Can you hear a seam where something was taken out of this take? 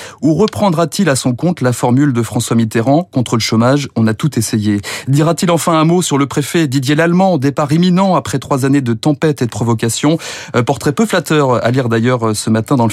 no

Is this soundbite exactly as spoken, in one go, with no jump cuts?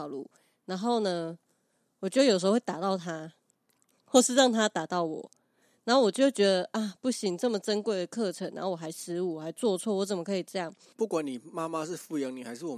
no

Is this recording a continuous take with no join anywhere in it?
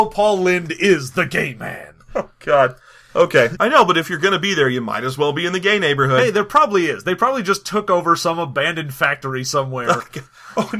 no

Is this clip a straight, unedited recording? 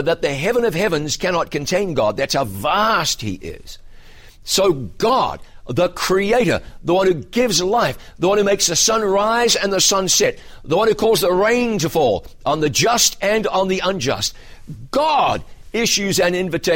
yes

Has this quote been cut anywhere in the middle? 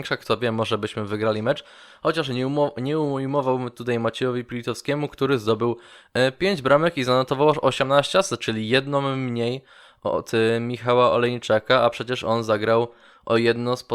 no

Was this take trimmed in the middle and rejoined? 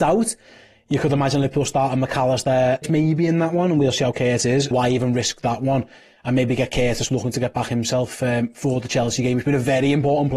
yes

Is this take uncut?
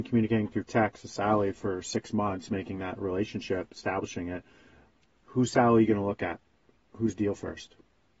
yes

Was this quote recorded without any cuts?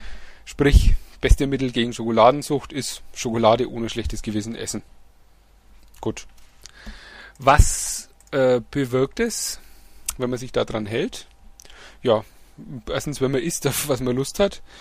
yes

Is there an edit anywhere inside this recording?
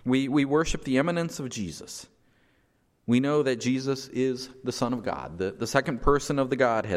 no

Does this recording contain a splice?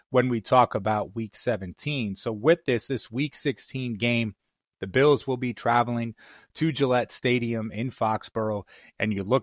no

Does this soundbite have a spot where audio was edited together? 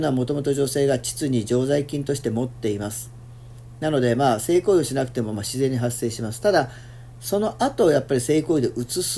no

